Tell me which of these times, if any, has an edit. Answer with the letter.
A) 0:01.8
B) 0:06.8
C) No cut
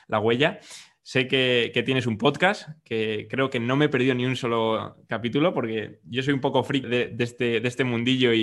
B